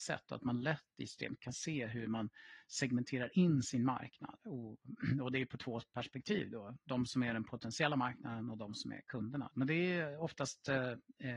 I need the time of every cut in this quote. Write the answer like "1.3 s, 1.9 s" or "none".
9.5 s